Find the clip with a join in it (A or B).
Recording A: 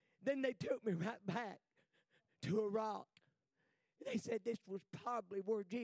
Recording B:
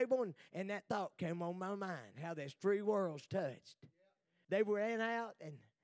B